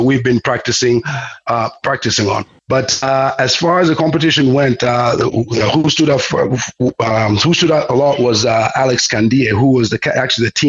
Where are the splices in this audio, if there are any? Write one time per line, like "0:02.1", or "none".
0:02.6